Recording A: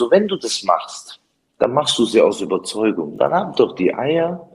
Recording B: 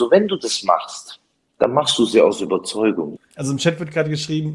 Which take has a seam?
B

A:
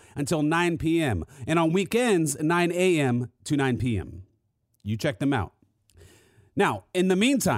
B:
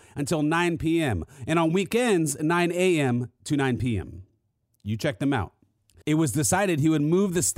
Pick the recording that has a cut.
B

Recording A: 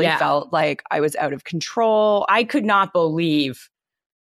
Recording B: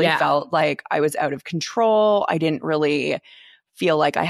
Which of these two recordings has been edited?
A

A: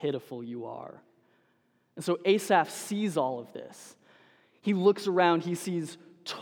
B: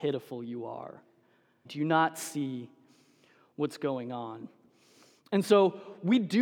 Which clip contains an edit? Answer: B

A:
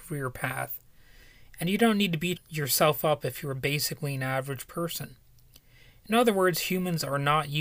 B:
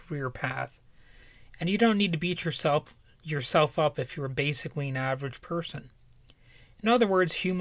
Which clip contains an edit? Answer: A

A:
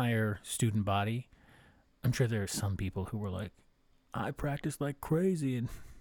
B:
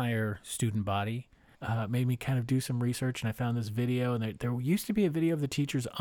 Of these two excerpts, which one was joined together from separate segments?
B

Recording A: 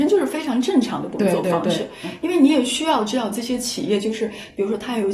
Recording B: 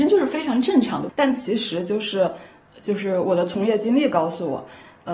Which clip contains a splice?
B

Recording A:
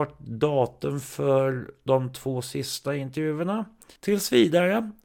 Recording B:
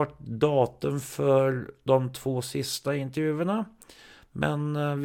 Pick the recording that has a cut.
A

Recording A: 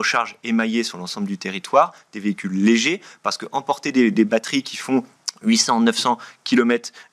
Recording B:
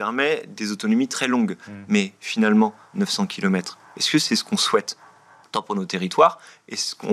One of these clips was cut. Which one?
B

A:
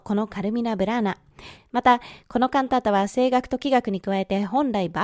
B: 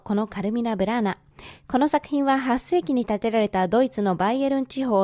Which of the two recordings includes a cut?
A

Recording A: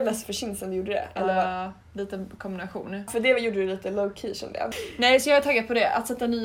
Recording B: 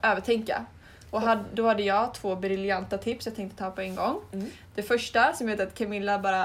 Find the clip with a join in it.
A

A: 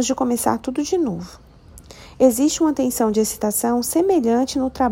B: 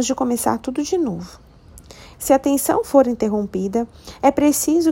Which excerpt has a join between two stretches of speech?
B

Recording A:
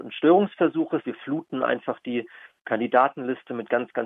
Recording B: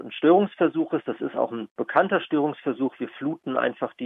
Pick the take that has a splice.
A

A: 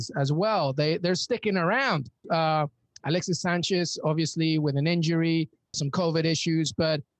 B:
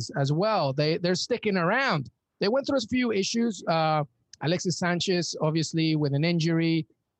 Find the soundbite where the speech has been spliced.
A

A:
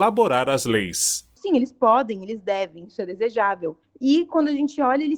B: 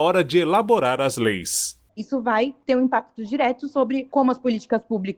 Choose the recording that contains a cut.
A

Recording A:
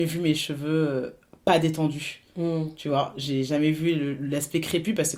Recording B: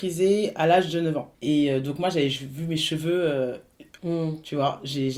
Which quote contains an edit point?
B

